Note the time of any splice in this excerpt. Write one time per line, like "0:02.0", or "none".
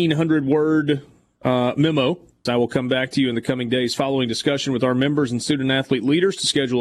0:02.5